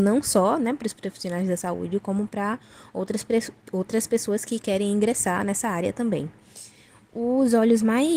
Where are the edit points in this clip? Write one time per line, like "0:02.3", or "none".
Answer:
none